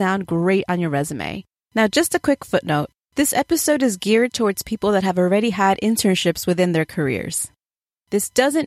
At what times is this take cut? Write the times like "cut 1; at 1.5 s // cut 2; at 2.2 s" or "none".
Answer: cut 1; at 1.7 s